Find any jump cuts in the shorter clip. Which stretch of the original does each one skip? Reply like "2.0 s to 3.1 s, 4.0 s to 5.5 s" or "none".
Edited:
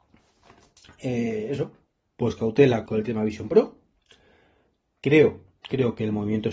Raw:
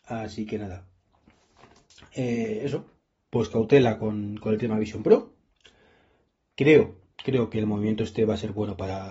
4.0 s to 4.4 s